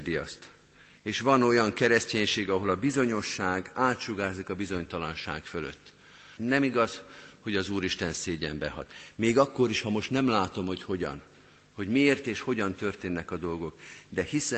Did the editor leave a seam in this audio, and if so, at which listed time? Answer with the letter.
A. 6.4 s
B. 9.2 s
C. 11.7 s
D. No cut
A